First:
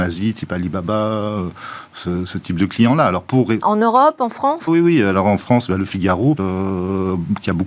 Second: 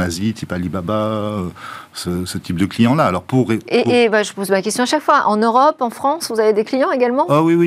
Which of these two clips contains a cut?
first; 3 cuts; at 3.6 s, 4.7 s, 6.4 s

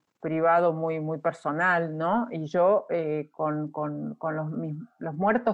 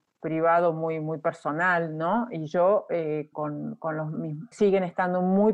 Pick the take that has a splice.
second; 2 cuts; at 3.3 s, 4.5 s

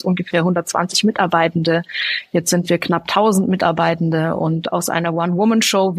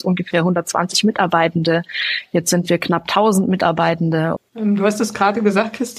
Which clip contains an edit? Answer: second; 1 cut; at 4.4 s

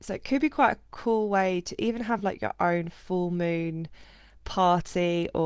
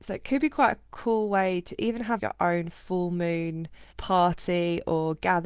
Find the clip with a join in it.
second; 2 cuts; at 2.2 s, 3.9 s

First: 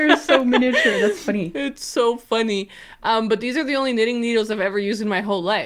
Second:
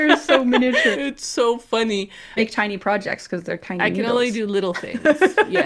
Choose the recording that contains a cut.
second; 2 cuts; at 0.9 s, 2.4 s

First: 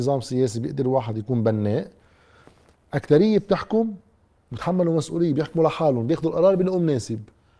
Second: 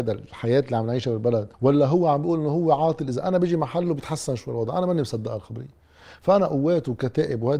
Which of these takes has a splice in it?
second; 1 cut; at 1.5 s

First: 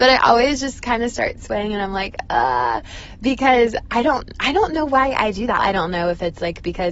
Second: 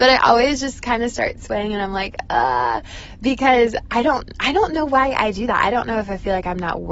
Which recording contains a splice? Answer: first; 1 cut; at 5.6 s

